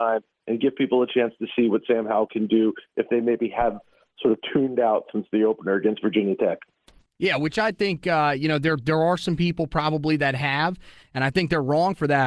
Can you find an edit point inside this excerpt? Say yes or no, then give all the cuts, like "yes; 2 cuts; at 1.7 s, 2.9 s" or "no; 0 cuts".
no; 0 cuts